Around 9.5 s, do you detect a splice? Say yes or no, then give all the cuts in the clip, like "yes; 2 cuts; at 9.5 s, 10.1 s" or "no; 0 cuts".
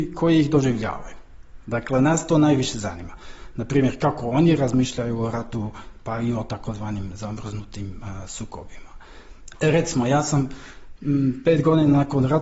yes; 1 cut; at 9.5 s